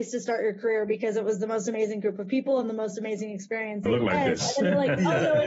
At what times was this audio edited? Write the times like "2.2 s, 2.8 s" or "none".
3.9 s

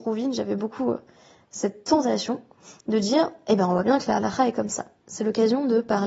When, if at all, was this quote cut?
5.0 s

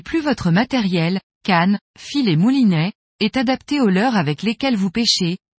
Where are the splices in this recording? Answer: none

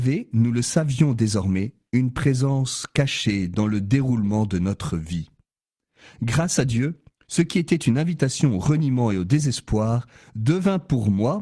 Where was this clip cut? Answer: none

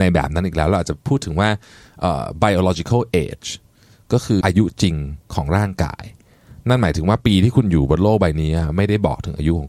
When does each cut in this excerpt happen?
4.4 s

